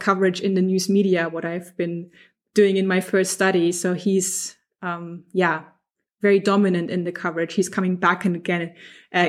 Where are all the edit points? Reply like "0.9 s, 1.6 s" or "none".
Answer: none